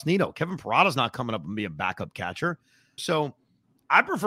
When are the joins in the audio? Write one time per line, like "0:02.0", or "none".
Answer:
0:03.0